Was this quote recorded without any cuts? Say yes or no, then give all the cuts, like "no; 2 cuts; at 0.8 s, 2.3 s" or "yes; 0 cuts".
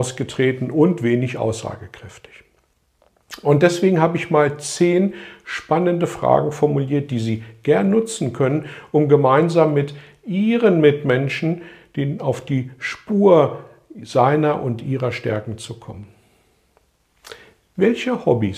yes; 0 cuts